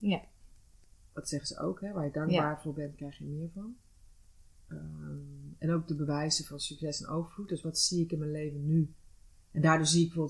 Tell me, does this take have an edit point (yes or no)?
no